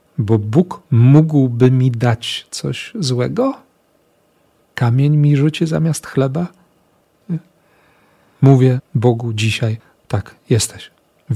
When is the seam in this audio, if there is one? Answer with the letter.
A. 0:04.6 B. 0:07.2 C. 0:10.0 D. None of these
B